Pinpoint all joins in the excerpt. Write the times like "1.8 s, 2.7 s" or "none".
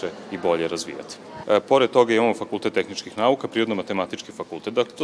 1.4 s